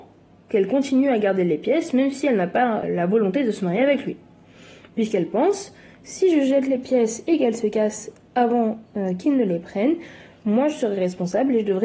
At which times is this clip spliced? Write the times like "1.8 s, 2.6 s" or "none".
2.8 s